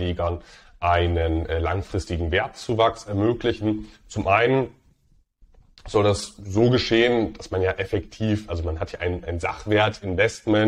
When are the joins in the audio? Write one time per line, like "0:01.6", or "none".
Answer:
none